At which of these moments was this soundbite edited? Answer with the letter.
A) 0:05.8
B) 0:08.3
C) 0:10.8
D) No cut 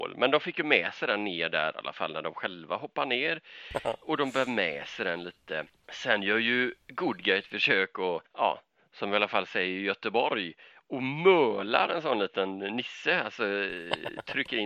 B